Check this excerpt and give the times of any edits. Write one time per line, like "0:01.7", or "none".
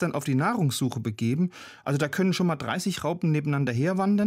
none